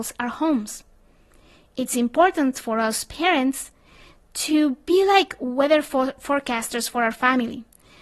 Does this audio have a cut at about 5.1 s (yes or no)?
no